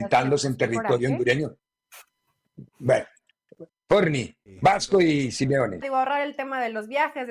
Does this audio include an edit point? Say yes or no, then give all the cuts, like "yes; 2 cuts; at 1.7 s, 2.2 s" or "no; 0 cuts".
yes; 2 cuts; at 3.7 s, 5.8 s